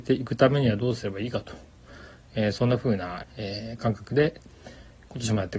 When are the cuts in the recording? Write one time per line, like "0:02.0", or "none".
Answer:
0:03.2